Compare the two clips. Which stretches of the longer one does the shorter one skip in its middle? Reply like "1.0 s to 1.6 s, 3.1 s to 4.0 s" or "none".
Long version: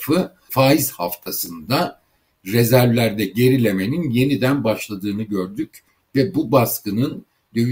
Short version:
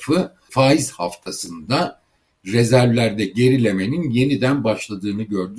none